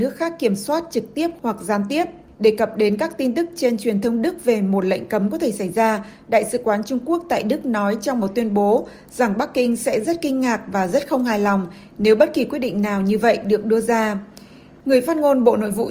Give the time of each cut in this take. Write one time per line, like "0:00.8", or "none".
0:02.3
0:14.8